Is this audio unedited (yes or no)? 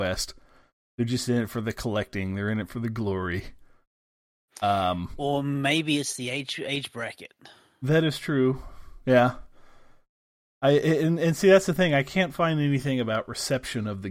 yes